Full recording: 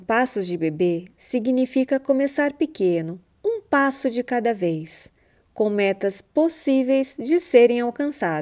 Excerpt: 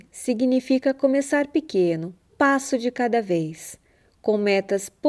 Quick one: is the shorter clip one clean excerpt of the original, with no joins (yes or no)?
no